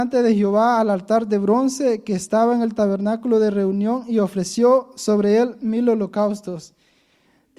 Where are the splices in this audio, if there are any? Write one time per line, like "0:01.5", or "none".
none

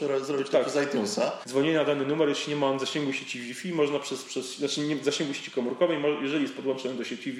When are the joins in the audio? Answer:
0:01.4

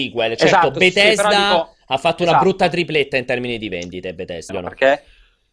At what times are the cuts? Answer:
0:04.5

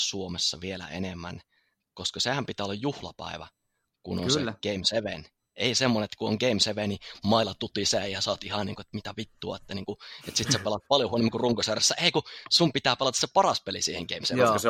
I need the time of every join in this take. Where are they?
none

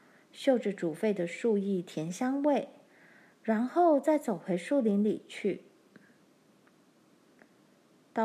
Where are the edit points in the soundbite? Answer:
none

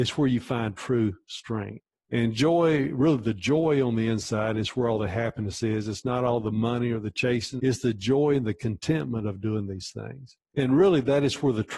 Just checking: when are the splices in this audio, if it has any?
0:07.6
0:10.4

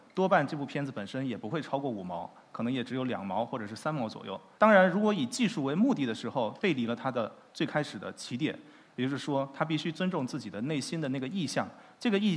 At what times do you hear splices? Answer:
0:04.6
0:06.6

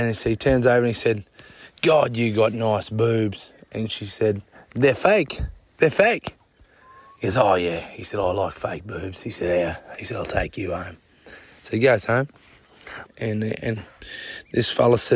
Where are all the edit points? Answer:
0:13.1

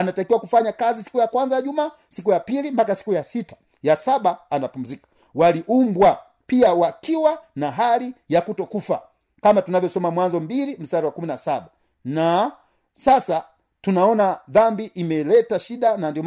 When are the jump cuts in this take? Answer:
none

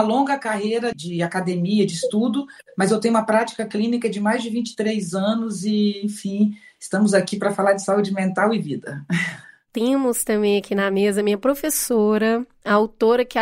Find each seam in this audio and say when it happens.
0:00.9

